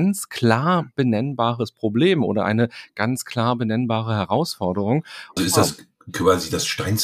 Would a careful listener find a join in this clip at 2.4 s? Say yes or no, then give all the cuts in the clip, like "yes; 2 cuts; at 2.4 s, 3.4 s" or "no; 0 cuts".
no; 1 cut; at 5.4 s